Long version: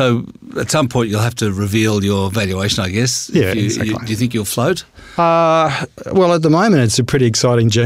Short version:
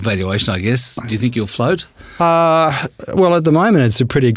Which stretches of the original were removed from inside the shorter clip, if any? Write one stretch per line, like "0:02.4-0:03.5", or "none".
0:03.3-0:04.0